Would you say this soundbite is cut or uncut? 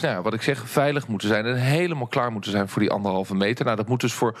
uncut